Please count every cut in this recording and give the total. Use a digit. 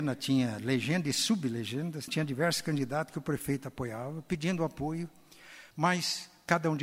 2